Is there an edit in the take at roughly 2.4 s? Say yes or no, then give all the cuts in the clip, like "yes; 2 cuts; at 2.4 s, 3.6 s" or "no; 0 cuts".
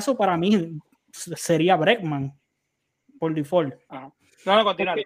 no; 1 cut; at 3.9 s